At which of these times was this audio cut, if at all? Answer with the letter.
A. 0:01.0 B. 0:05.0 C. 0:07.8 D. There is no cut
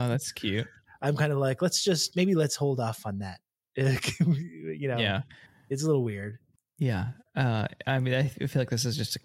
D